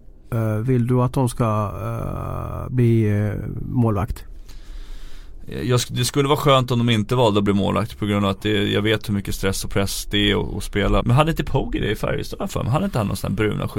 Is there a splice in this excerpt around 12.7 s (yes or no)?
no